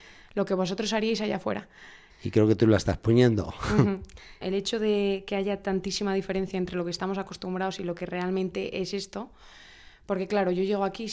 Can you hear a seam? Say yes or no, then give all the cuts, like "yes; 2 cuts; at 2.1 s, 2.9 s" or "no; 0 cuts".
yes; 2 cuts; at 2.1 s, 4.4 s